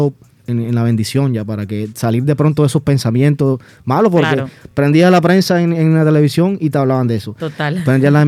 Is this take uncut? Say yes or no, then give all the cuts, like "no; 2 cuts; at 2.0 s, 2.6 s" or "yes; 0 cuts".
yes; 0 cuts